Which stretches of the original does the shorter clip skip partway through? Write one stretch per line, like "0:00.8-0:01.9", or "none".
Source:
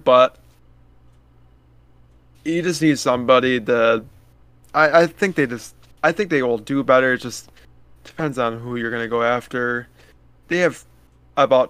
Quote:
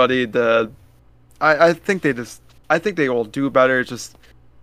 none